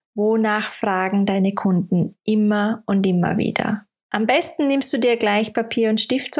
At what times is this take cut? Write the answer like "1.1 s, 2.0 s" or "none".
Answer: none